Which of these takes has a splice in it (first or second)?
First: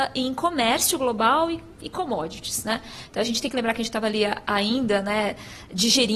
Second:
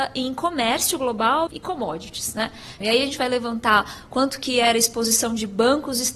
second